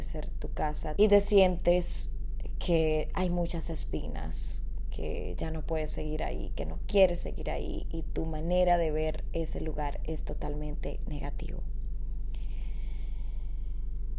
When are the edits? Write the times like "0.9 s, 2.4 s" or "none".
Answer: 1.0 s